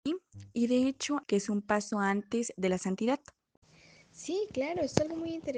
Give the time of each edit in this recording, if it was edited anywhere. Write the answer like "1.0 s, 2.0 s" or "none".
1.2 s